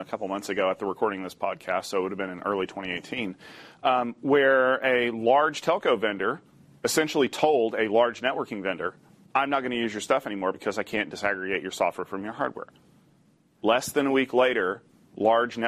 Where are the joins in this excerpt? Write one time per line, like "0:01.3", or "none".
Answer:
none